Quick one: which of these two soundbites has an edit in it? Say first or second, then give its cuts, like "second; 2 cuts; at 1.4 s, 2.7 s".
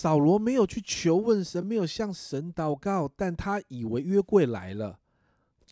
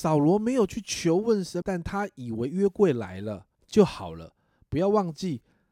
second; 2 cuts; at 1.6 s, 3.5 s